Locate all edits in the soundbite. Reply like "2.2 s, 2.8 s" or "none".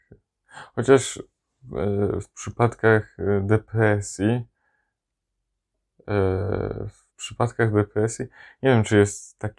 7.1 s